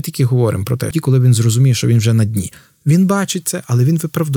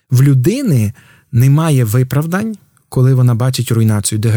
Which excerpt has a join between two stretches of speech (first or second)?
first